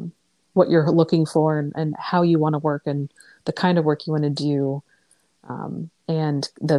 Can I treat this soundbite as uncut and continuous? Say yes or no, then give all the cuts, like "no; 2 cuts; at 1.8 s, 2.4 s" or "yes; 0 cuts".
yes; 0 cuts